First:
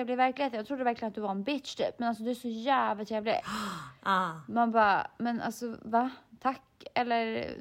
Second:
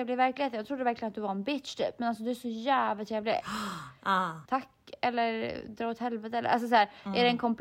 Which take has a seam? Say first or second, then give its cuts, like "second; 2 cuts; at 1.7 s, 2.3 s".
second; 1 cut; at 4.5 s